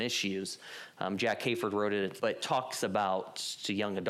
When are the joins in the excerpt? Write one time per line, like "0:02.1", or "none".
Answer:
0:02.2

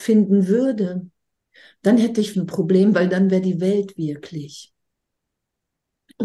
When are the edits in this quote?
0:02.3

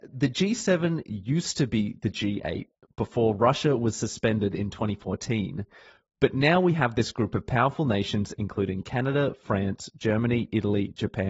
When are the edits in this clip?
none

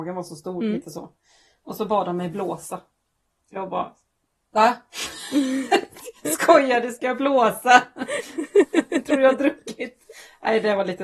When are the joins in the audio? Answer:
none

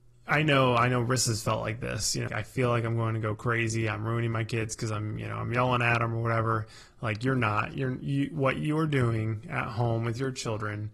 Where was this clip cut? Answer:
0:02.3

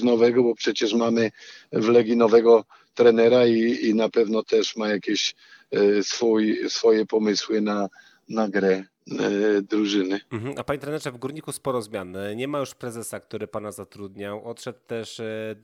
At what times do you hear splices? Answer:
none

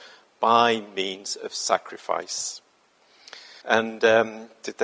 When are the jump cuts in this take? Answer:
0:03.6

